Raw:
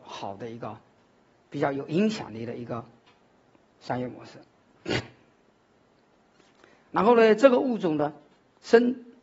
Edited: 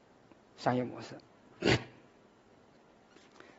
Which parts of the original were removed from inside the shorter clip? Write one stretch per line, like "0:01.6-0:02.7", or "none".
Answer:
none